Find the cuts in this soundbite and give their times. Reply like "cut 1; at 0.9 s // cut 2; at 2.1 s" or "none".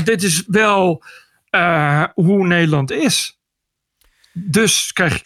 none